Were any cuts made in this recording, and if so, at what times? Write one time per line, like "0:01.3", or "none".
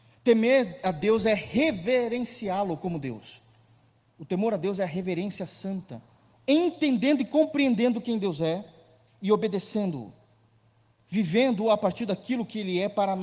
0:06.3